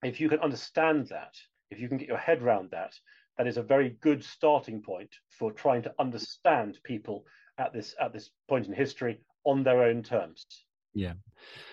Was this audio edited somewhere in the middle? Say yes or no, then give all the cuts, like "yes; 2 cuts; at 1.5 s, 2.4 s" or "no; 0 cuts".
no; 0 cuts